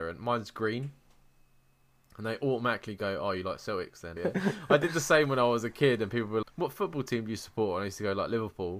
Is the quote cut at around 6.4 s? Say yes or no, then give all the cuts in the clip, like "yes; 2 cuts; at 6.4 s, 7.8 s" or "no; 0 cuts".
yes; 2 cuts; at 4.2 s, 6.4 s